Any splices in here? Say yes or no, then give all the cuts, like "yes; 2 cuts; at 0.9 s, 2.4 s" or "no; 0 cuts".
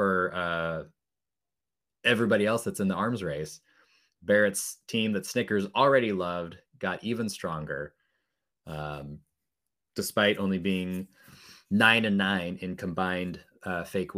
no; 0 cuts